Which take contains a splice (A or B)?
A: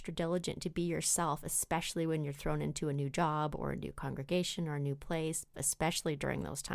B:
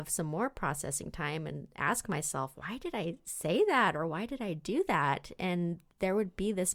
A